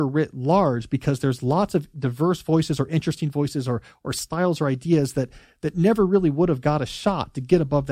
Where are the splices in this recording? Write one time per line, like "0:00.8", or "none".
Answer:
none